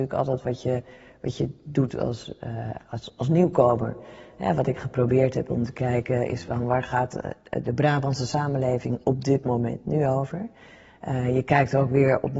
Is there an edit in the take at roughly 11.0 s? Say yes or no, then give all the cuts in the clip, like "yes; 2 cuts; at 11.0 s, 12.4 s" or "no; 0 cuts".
no; 0 cuts